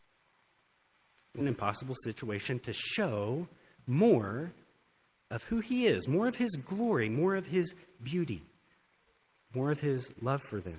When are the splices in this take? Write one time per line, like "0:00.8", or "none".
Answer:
0:01.4